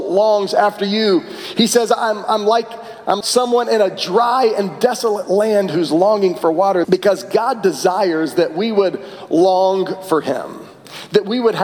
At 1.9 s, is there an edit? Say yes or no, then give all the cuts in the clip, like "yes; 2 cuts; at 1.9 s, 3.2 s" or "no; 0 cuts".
no; 2 cuts; at 3.2 s, 6.8 s